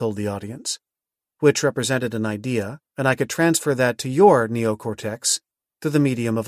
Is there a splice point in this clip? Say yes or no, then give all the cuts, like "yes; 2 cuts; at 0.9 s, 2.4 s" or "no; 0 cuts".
yes; 2 cuts; at 1.2 s, 2.9 s